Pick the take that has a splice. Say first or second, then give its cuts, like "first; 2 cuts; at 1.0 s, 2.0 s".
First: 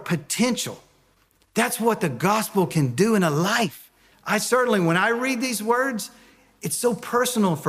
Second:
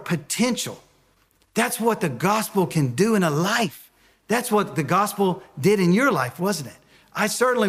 first; 1 cut; at 4.1 s